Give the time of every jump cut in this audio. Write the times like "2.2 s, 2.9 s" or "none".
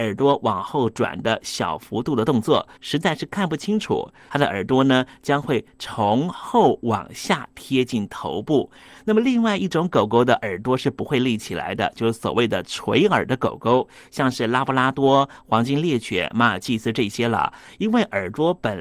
2.8 s, 4.3 s